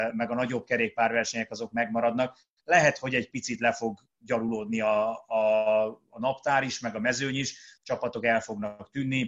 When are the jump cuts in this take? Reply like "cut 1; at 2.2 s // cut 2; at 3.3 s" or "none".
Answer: none